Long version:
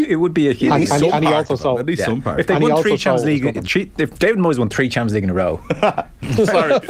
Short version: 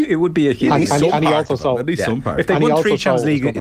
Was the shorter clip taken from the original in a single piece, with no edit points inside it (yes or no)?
yes